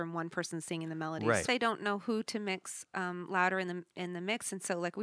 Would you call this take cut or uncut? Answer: cut